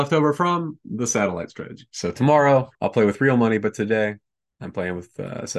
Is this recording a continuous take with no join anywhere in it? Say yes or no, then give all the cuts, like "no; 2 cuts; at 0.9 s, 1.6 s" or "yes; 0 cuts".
no; 1 cut; at 2.7 s